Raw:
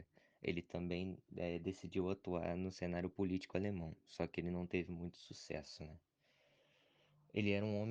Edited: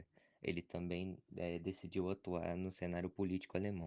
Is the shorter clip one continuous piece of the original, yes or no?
yes